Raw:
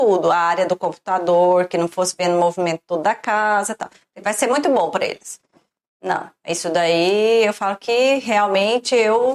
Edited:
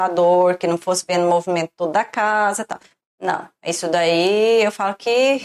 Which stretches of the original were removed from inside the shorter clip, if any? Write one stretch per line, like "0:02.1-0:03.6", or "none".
0:04.1-0:05.8